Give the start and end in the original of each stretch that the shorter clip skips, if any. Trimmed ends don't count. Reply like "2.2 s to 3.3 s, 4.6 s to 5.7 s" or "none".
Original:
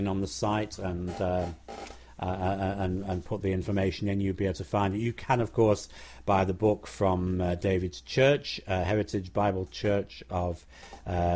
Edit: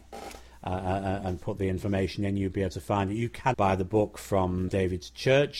2.8 s to 3.0 s, 5.4 s to 6.2 s, 7.4 s to 7.6 s